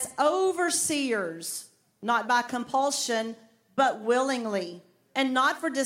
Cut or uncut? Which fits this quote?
uncut